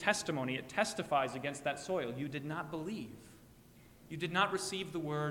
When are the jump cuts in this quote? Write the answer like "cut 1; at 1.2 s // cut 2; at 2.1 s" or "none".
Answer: none